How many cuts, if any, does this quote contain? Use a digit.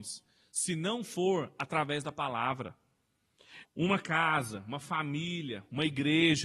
1